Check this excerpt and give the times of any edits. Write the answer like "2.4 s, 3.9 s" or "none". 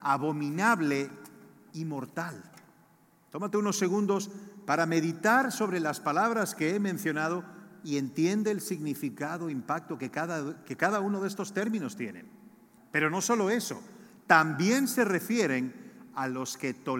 12.8 s